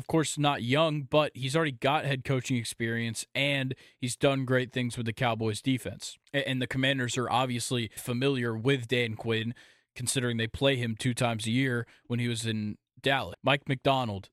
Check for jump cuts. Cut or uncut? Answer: cut